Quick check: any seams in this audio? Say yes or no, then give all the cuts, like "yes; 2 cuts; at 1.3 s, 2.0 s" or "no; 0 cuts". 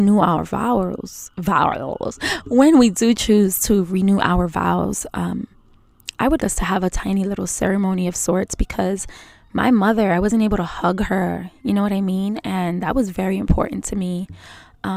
yes; 1 cut; at 6.4 s